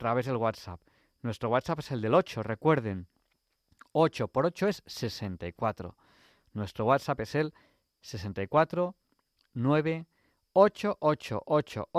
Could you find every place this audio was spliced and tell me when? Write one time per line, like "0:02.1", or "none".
none